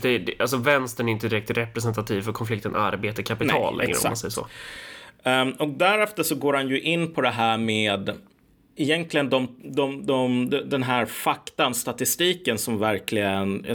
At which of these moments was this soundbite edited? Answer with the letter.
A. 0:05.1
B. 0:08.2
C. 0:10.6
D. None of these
D